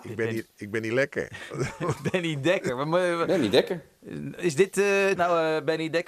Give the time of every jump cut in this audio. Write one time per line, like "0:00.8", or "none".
0:05.1